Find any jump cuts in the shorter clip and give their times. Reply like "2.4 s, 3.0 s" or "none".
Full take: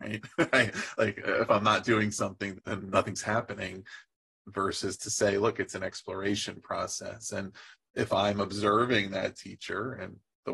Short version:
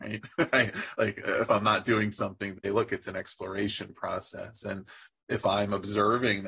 2.6 s